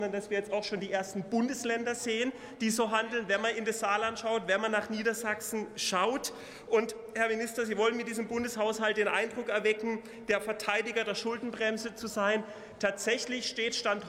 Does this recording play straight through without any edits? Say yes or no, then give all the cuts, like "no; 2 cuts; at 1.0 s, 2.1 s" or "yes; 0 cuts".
yes; 0 cuts